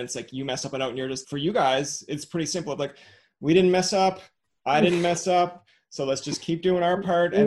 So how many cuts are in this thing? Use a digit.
1